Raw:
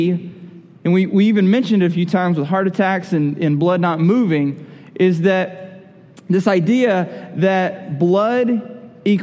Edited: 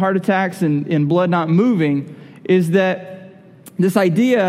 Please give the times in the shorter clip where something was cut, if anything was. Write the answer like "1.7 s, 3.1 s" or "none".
none